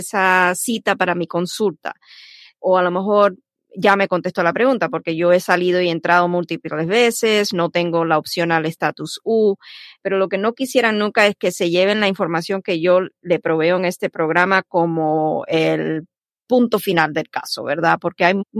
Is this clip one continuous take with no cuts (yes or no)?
yes